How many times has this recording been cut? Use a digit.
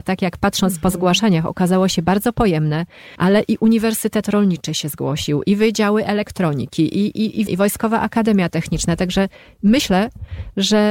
2